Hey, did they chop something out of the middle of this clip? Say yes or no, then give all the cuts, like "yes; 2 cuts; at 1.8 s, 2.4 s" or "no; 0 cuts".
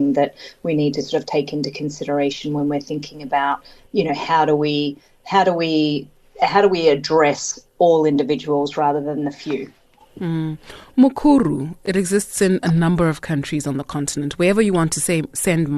no; 0 cuts